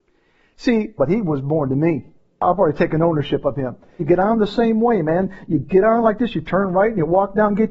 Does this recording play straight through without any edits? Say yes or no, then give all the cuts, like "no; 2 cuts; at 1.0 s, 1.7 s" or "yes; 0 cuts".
no; 2 cuts; at 1.0 s, 4.0 s